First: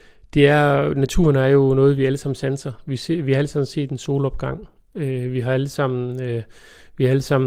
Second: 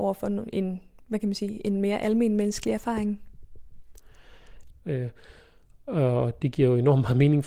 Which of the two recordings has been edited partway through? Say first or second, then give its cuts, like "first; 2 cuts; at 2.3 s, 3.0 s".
second; 1 cut; at 4.7 s